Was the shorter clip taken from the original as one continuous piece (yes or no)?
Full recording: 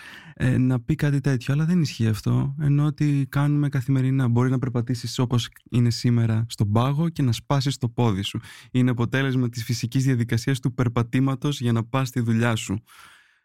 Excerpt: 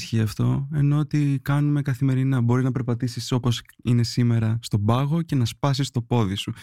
yes